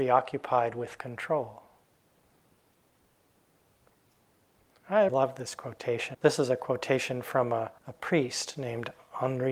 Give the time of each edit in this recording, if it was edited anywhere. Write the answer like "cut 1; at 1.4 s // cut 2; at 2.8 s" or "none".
cut 1; at 5.1 s // cut 2; at 6.1 s // cut 3; at 7.8 s